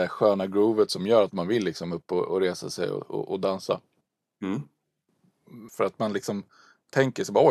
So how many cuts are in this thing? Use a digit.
1